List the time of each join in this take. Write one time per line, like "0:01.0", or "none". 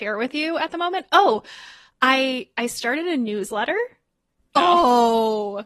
0:04.6